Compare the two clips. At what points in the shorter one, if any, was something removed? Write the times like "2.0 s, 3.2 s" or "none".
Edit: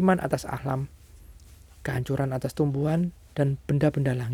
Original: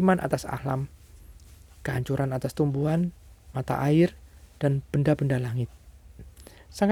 3.3 s